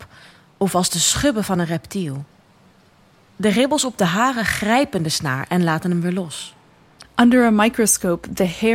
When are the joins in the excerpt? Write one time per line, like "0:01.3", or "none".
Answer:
0:07.0